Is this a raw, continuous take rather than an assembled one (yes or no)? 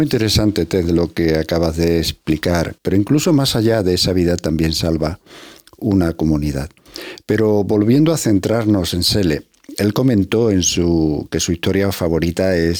no